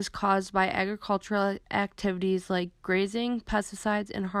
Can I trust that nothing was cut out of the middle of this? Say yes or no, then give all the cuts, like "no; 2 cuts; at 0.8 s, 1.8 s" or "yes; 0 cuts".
yes; 0 cuts